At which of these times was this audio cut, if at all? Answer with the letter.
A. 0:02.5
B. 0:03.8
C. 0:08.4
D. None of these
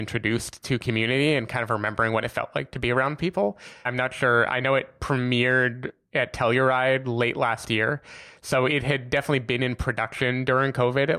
B